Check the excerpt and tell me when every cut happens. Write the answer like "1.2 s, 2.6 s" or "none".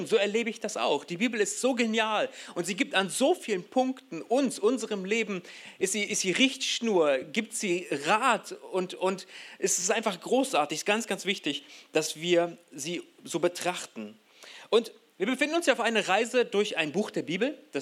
none